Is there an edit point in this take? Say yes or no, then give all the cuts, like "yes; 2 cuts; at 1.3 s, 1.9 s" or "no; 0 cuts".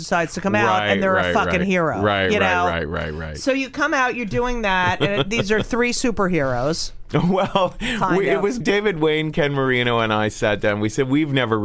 yes; 1 cut; at 8.6 s